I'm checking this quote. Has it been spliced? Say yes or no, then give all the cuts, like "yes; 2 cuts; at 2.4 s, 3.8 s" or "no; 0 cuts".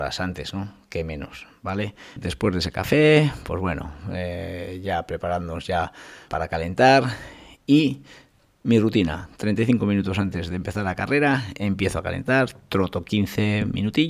yes; 2 cuts; at 2.2 s, 6.3 s